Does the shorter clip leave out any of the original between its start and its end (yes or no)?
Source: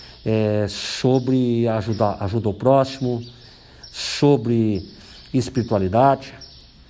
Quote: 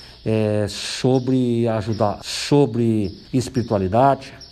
yes